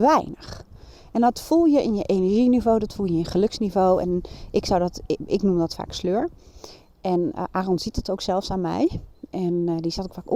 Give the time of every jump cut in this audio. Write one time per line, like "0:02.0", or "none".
none